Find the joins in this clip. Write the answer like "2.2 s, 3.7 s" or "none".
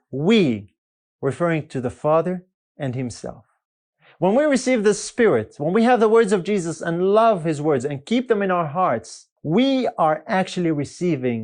9.4 s